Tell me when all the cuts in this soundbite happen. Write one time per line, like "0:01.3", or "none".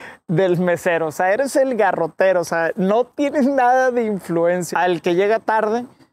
0:04.7